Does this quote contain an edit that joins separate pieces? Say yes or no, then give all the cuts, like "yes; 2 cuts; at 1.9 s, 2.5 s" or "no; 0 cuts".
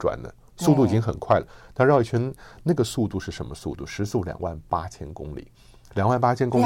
no; 0 cuts